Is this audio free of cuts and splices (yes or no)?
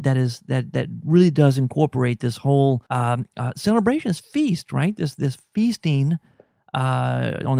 no